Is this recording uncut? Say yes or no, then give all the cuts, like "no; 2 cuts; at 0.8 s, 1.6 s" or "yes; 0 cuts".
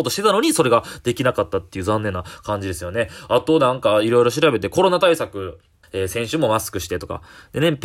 no; 1 cut; at 5.8 s